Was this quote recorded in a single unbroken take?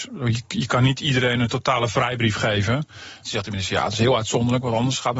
no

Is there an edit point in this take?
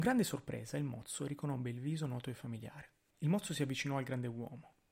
yes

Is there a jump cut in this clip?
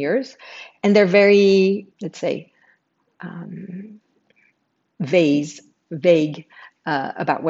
yes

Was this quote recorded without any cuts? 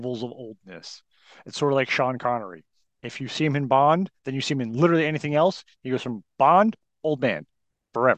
yes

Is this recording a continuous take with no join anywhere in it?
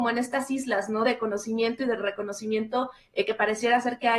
yes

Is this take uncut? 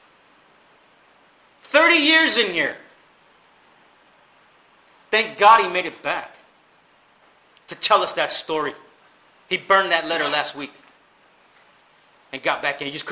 yes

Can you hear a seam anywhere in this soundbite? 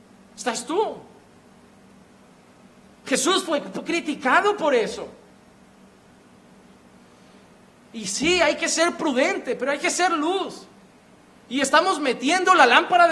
no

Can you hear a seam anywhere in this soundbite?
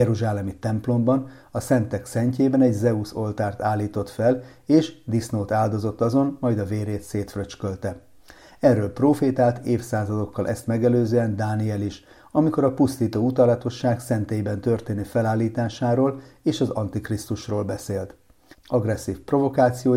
yes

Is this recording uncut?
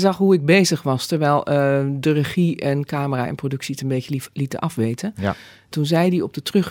yes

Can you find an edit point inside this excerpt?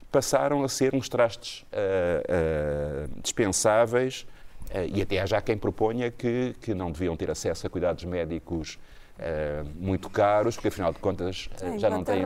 no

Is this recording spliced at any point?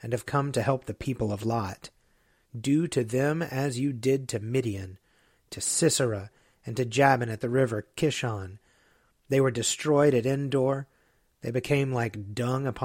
no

